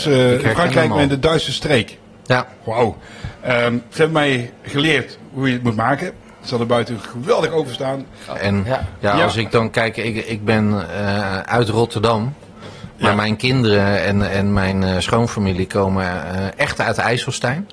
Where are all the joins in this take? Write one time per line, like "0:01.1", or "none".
0:08.4